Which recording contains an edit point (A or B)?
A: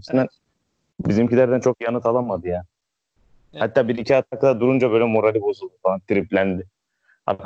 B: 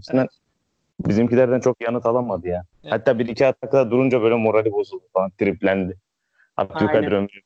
B